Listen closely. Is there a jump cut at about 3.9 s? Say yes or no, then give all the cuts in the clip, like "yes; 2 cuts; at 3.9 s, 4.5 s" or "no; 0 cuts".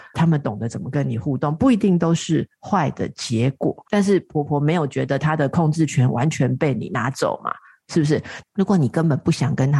yes; 2 cuts; at 3.9 s, 8.4 s